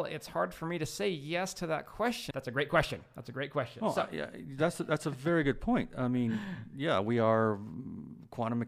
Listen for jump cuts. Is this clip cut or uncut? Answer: cut